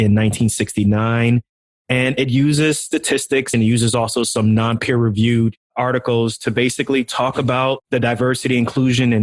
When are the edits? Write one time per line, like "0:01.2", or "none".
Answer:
0:01.8
0:03.5